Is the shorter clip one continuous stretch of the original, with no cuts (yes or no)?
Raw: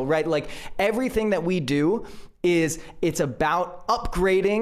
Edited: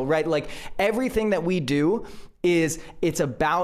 yes